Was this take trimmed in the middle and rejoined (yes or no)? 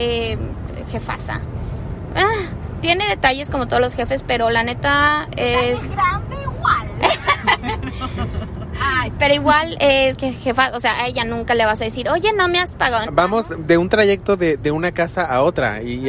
yes